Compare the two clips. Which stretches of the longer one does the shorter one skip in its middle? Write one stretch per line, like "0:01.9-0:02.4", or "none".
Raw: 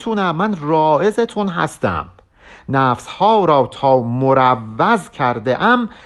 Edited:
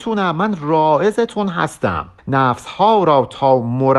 0:02.2-0:02.6

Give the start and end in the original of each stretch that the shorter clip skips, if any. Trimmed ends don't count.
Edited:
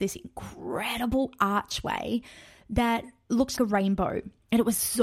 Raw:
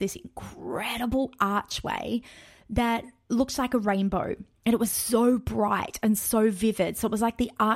0:03.6-0:03.7

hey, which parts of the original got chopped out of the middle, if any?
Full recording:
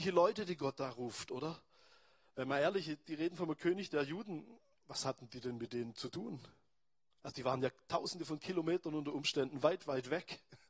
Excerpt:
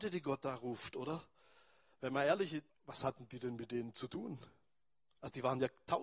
0:03.0-0:04.7

